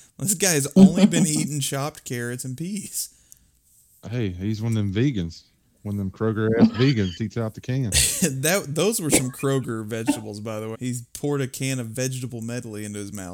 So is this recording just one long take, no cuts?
no; 2 cuts; at 7.2 s, 10.7 s

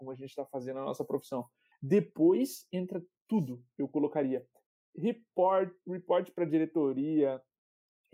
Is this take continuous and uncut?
no; 1 cut; at 1.7 s

